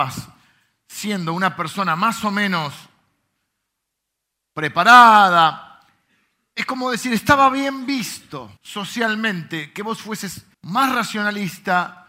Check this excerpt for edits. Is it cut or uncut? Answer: cut